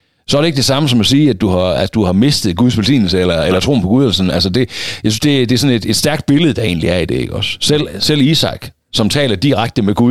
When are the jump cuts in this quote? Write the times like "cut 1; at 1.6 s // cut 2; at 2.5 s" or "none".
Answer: none